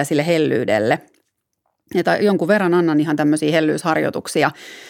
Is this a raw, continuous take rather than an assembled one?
yes; 0 cuts

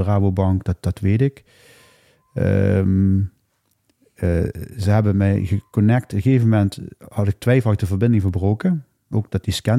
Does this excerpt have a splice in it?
no; 0 cuts

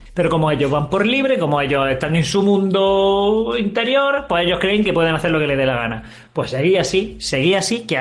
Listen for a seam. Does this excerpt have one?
no; 0 cuts

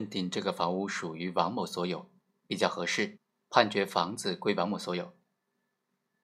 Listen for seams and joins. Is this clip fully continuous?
no; 1 cut; at 3.4 s

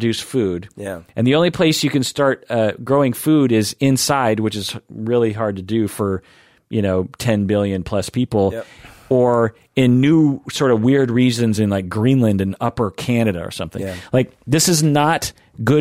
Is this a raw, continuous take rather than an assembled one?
yes; 0 cuts

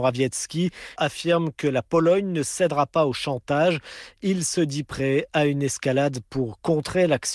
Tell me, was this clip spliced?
yes; 1 cut; at 1.0 s

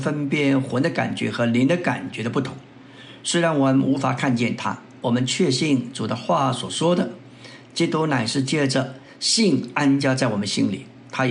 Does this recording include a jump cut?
no; 0 cuts

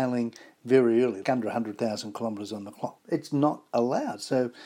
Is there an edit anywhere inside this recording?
yes; 2 cuts; at 1.2 s, 3.0 s

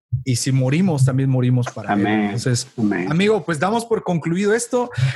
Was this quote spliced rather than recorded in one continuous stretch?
no; 0 cuts

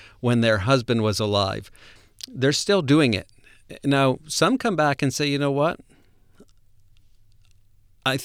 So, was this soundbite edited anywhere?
no; 0 cuts

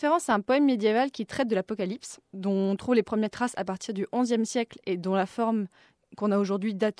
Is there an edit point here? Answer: yes; 1 cut; at 2.2 s

